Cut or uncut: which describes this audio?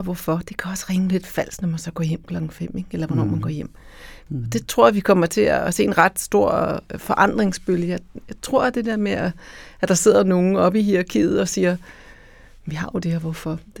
cut